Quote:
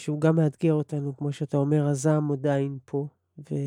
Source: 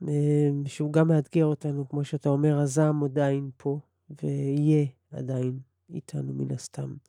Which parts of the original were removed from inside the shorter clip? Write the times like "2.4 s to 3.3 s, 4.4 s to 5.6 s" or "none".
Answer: none